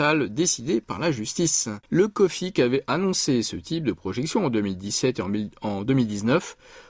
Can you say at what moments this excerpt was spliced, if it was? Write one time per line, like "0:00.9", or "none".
0:01.9